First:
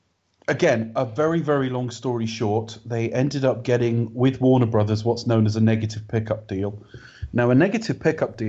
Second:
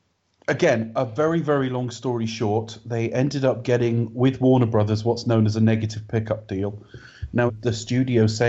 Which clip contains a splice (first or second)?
second